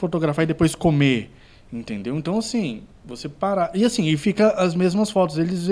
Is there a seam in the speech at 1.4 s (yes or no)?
no